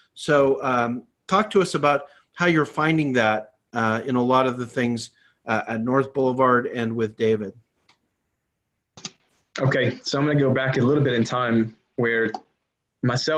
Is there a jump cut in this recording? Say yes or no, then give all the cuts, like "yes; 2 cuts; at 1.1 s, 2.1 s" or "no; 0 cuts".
no; 0 cuts